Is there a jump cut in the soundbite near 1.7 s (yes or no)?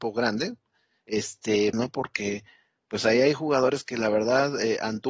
yes